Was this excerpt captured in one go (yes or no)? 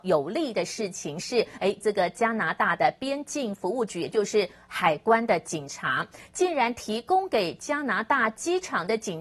yes